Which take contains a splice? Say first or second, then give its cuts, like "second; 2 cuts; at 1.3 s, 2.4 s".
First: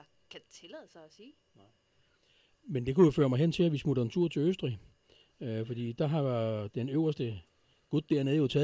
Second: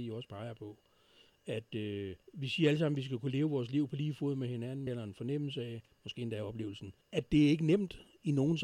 second; 3 cuts; at 2.2 s, 4.9 s, 7.0 s